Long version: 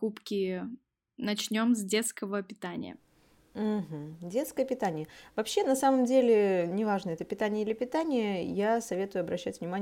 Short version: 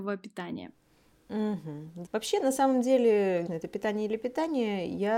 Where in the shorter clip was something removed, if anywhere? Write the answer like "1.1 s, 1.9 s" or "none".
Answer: 2.0 s, 3.5 s